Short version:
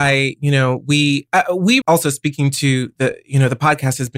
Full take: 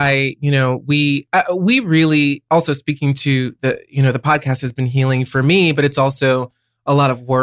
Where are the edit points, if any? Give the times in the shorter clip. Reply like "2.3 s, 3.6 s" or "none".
1.8 s